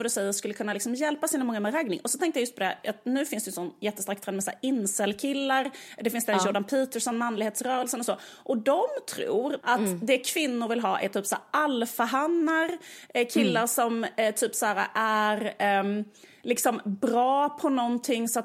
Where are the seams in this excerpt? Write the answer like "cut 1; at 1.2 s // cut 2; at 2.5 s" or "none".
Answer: cut 1; at 9.6 s